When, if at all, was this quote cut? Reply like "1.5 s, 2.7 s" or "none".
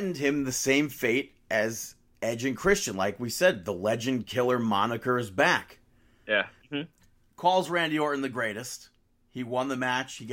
6.6 s

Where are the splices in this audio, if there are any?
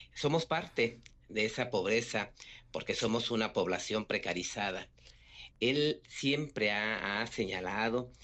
5.5 s

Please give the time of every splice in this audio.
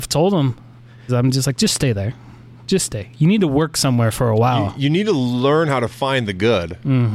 1.1 s

